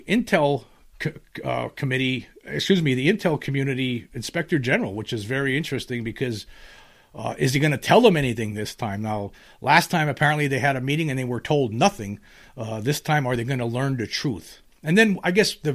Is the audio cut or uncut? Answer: uncut